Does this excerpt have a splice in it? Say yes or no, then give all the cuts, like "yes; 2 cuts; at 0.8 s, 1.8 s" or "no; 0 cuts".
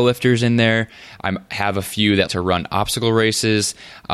yes; 1 cut; at 2.3 s